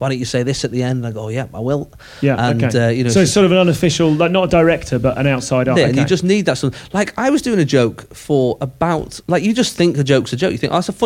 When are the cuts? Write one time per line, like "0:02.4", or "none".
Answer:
0:05.7
0:09.2